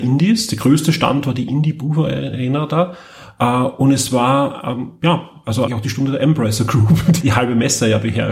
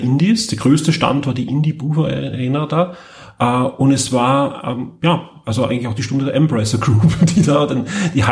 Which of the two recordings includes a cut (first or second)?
first